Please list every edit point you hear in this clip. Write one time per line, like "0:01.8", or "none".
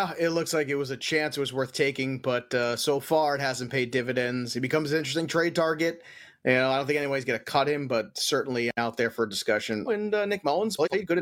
0:09.9